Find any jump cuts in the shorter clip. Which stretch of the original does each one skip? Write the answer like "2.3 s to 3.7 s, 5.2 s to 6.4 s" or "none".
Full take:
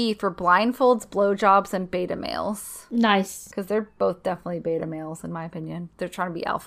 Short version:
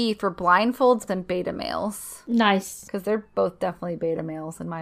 1.1 s to 1.7 s